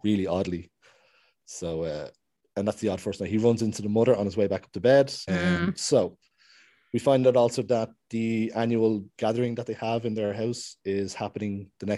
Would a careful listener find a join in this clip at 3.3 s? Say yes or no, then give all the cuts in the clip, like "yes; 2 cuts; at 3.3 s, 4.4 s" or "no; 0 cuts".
no; 1 cut; at 5.3 s